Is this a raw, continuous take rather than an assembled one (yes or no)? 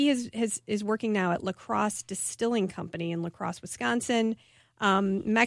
yes